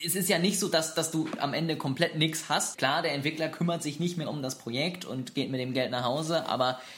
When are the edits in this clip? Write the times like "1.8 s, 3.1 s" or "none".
2.7 s